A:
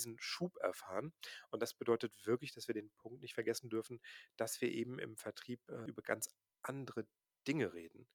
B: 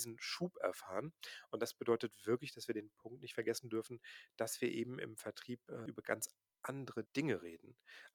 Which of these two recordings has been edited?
B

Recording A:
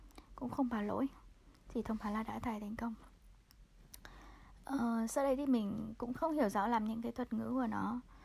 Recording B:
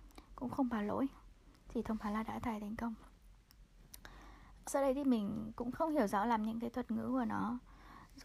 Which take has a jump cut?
B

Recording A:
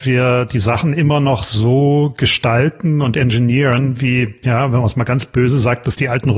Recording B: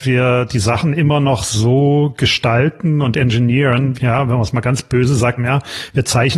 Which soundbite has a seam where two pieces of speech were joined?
B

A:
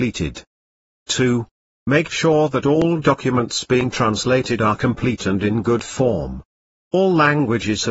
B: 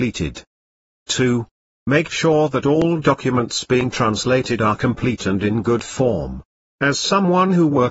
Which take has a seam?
A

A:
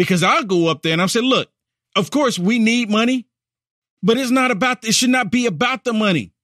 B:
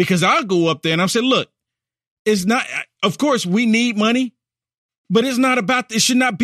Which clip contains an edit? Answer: A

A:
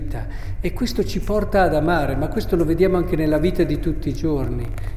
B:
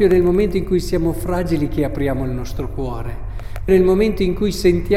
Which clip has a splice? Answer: B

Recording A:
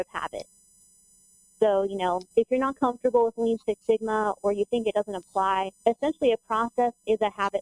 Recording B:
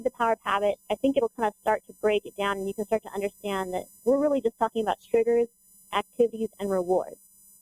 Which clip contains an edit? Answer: A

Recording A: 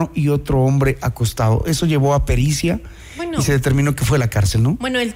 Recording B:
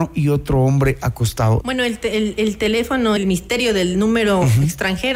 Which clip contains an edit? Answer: B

